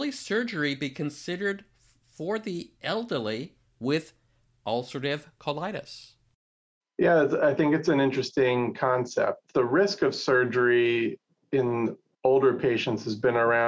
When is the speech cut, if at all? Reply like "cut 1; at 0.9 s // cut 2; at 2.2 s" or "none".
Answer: none

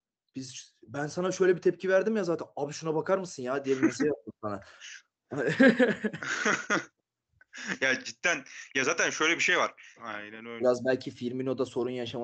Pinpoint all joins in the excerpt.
cut 1; at 10.0 s

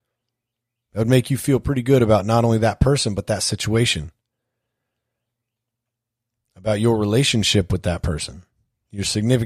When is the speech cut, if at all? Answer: none

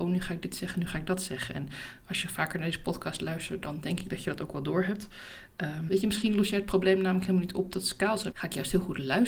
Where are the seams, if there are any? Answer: cut 1; at 5.9 s // cut 2; at 8.3 s

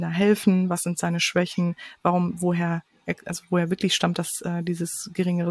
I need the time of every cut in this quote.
none

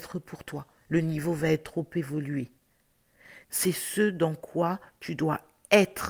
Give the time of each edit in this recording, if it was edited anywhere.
cut 1; at 3.4 s

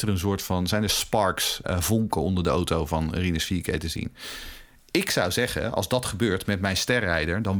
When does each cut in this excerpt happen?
cut 1; at 1.6 s

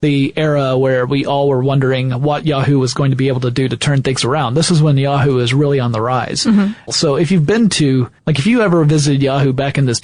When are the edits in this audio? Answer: cut 1; at 6.9 s // cut 2; at 8.2 s

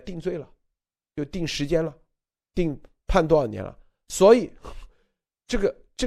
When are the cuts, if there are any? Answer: none

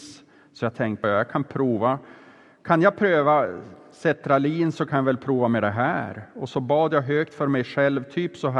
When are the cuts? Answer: cut 1; at 1.0 s

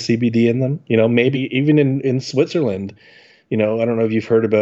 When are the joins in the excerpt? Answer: cut 1; at 1.3 s

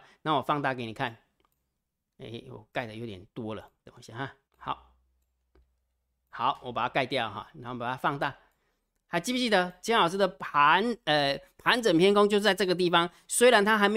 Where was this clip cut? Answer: cut 1; at 4.5 s

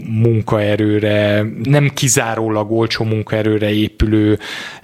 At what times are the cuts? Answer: cut 1; at 1.7 s

